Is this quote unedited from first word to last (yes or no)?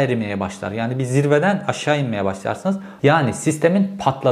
no